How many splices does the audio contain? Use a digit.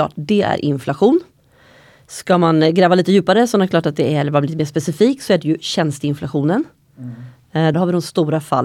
1